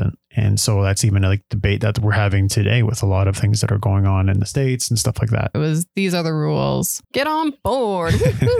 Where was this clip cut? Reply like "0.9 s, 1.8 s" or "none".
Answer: 5.5 s, 7.0 s